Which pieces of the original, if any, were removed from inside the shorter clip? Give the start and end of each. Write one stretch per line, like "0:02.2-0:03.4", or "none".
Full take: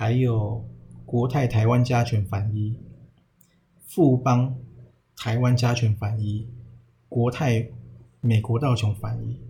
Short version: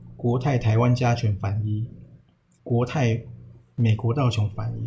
0:03.4-0:07.0